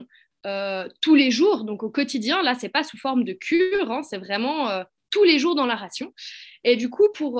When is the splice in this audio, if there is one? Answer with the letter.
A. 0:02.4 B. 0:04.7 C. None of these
C